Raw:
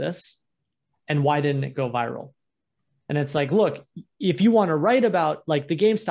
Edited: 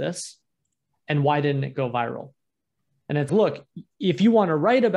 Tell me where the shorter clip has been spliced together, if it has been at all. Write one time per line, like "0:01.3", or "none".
0:03.3